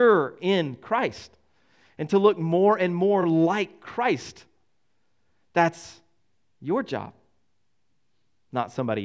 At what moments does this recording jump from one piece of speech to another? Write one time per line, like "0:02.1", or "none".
none